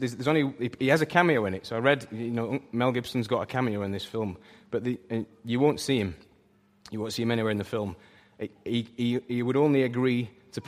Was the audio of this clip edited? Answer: no; 0 cuts

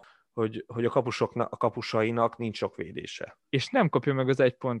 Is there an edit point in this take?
yes; 1 cut; at 3.4 s

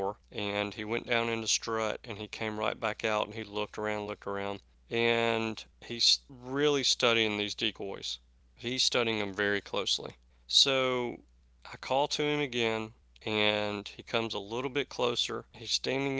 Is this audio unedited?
no; 1 cut; at 4.1 s

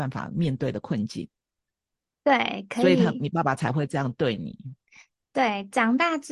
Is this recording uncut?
yes; 0 cuts

